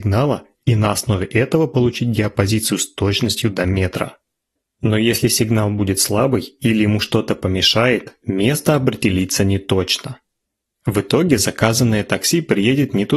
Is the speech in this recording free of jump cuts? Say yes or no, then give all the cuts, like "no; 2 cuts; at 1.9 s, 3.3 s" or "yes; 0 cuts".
yes; 0 cuts